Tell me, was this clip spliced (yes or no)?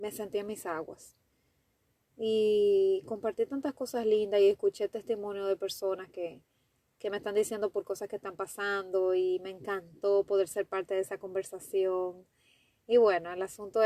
no